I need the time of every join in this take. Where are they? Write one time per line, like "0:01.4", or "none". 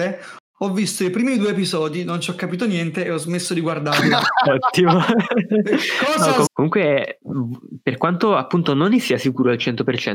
0:06.5